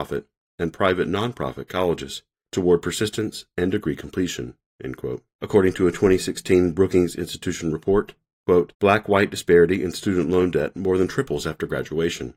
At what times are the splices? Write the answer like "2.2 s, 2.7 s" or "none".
5.3 s, 8.7 s